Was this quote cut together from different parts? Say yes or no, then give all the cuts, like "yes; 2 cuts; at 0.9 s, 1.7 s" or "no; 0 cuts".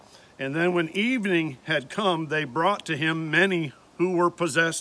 no; 0 cuts